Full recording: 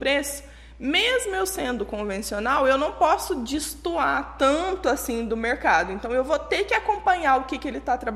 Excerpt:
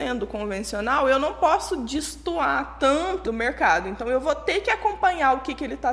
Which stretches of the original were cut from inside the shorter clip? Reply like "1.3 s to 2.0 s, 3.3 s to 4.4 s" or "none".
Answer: 4.8 s to 5.3 s